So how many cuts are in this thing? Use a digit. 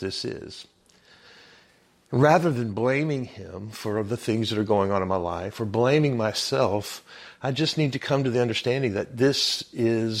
0